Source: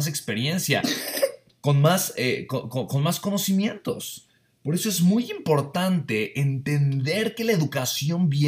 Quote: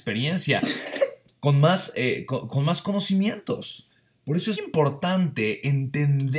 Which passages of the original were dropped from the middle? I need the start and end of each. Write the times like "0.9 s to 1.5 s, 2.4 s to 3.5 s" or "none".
2.7 s to 2.9 s, 4.9 s to 5.3 s